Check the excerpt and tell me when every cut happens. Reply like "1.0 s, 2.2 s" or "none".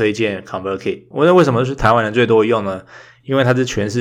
1.1 s